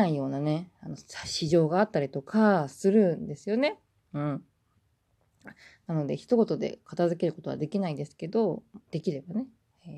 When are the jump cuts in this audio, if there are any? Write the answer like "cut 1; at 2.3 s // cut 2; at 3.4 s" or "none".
cut 1; at 8.8 s